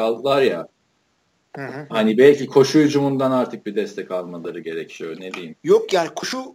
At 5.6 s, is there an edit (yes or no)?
no